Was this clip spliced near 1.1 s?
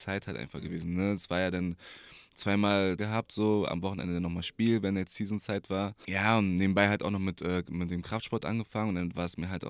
no; 1 cut; at 3.0 s

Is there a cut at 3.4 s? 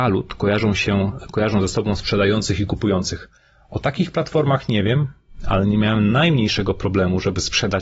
no; 0 cuts

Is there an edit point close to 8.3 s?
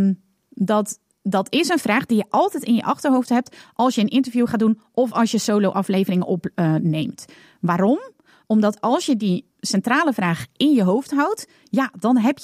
no; 0 cuts

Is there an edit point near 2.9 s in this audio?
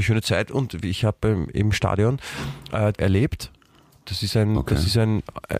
yes; 1 cut; at 2.9 s

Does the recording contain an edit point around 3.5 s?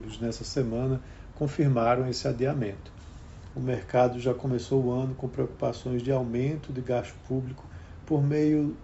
yes; 1 cut; at 3.5 s

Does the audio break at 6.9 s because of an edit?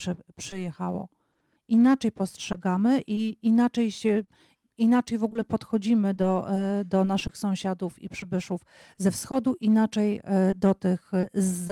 no; 1 cut; at 1.6 s

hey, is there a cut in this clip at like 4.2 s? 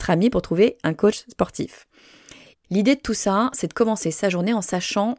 no; 1 cut; at 2.5 s

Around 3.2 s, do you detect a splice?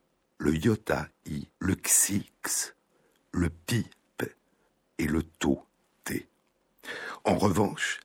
no; 1 cut; at 1.5 s

